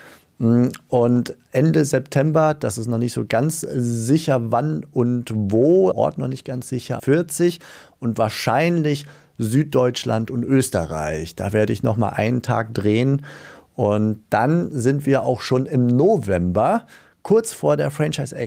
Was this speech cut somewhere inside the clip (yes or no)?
yes